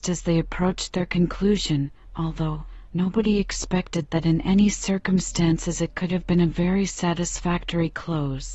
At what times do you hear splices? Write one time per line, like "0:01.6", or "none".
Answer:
0:02.9